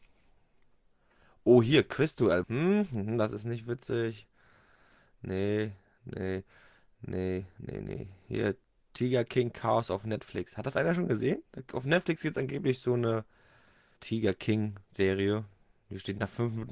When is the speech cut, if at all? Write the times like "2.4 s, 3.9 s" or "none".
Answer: 2.4 s, 14.0 s